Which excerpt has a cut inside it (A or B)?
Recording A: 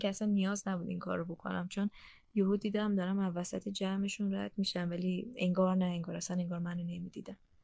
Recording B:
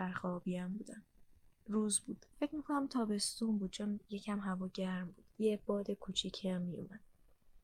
B